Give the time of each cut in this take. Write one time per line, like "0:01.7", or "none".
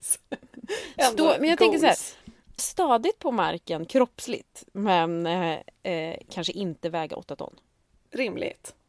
0:02.6